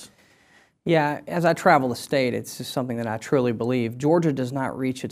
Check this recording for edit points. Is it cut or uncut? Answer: uncut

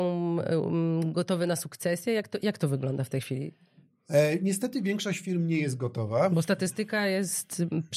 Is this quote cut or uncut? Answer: uncut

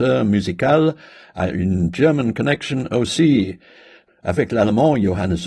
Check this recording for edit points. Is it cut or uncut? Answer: uncut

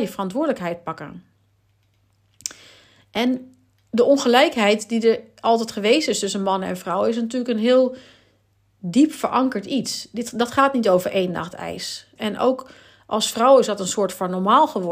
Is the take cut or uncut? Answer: cut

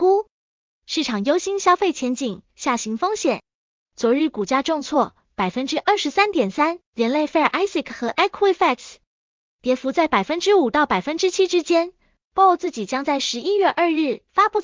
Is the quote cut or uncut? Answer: cut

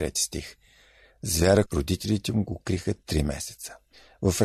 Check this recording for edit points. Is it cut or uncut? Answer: cut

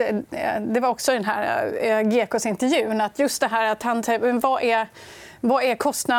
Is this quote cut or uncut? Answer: uncut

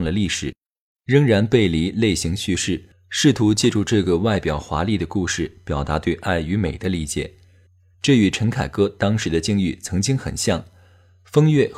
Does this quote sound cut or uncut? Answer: cut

